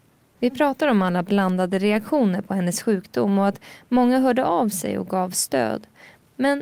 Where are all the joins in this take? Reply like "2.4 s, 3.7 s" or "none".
none